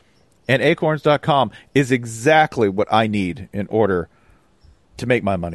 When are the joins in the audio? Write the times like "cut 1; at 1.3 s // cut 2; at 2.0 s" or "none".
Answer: none